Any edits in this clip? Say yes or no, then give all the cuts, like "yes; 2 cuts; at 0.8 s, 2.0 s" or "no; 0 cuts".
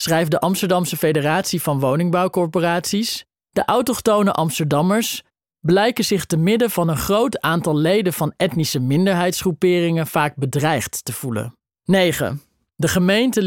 yes; 2 cuts; at 3.4 s, 11.8 s